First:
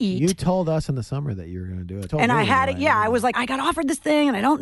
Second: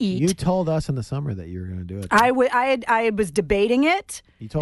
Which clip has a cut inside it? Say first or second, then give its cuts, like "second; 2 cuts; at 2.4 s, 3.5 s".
first; 2 cuts; at 2.1 s, 3.3 s